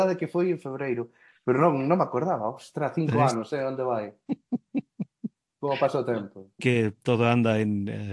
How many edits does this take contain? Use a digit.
1